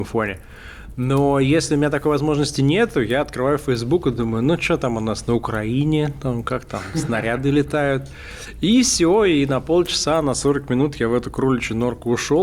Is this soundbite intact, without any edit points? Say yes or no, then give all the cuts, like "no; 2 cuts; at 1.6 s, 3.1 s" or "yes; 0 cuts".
yes; 0 cuts